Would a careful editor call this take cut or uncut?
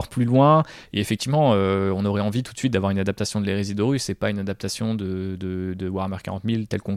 uncut